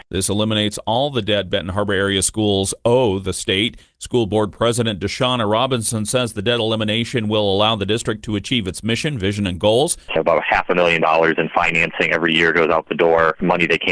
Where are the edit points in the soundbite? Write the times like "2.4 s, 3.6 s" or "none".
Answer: 10.1 s